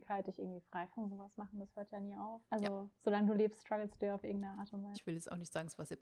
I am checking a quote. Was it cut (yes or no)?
yes